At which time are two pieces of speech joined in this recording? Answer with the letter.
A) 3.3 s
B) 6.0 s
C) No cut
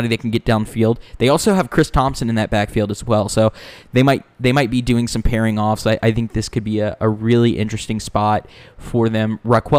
C